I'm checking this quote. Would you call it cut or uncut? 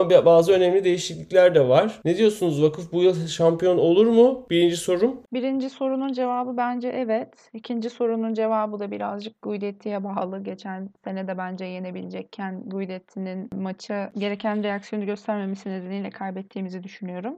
cut